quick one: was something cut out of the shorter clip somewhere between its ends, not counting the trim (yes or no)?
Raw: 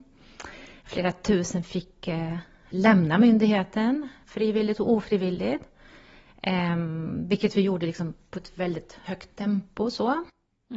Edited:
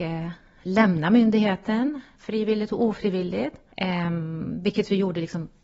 yes